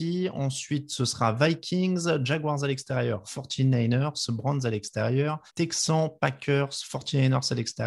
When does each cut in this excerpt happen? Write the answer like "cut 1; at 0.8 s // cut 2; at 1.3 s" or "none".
cut 1; at 3.2 s // cut 2; at 5.5 s